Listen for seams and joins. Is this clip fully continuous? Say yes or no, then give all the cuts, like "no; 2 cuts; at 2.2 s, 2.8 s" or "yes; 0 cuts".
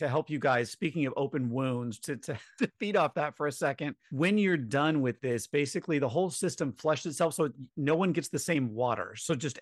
yes; 0 cuts